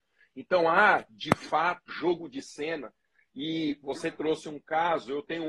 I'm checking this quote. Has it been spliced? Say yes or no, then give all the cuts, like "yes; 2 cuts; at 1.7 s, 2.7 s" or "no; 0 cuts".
yes; 1 cut; at 1.9 s